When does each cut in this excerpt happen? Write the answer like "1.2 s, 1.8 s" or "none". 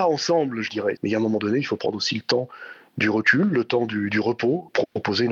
1.0 s